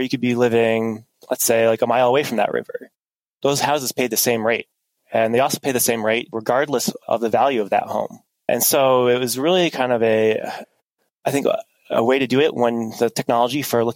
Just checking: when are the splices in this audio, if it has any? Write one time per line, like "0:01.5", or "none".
none